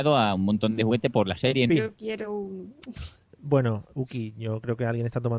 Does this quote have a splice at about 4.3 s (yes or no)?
no